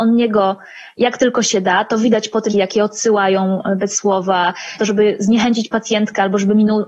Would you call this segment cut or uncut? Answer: cut